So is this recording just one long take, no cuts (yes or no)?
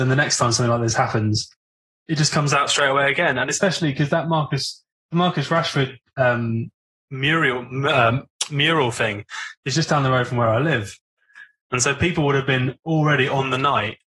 yes